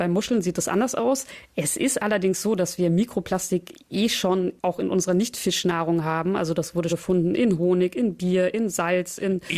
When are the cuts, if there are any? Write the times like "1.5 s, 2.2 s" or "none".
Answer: 6.9 s